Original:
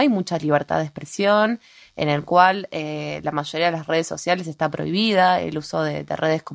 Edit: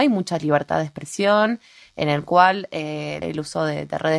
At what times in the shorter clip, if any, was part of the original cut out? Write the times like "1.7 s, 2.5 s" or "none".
3.2 s